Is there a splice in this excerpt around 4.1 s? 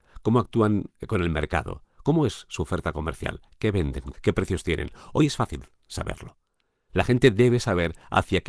yes; 2 cuts; at 4.1 s, 6.9 s

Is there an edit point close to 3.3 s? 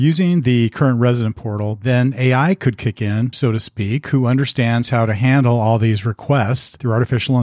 yes; 1 cut; at 3.3 s

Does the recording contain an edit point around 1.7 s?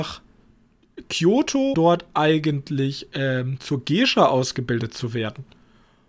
yes; 1 cut; at 1.7 s

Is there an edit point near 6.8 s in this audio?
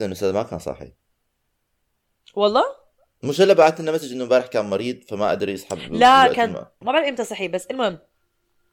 yes; 1 cut; at 6.8 s

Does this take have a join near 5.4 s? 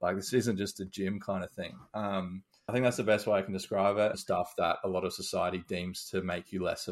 no; 2 cuts; at 2.7 s, 4.1 s

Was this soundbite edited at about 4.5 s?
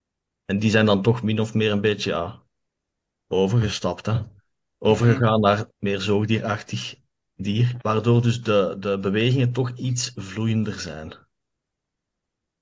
no; 2 cuts; at 5.7 s, 7.8 s

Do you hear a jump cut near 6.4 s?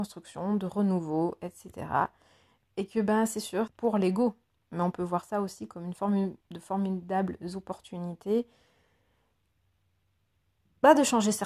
yes; 2 cuts; at 3.7 s, 6.4 s

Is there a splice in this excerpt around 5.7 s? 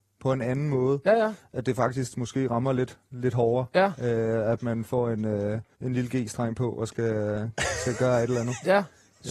yes; 1 cut; at 5.7 s

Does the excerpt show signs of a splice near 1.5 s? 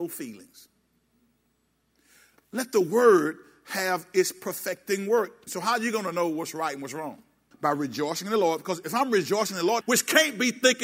no; 3 cuts; at 5.5 s, 7.5 s, 9.8 s

